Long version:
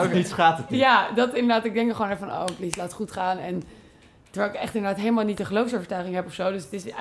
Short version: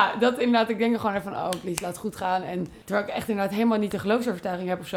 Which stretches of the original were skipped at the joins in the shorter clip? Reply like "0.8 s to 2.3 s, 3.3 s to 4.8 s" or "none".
3.8 s to 4.3 s